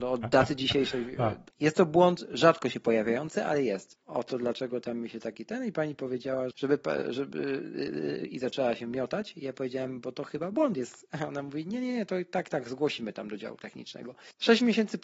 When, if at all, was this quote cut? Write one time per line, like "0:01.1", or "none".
0:01.5
0:03.9
0:06.5